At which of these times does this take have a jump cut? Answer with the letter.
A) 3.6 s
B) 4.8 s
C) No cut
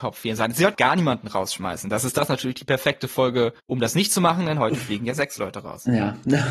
A